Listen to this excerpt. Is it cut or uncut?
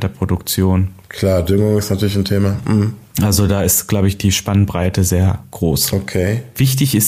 uncut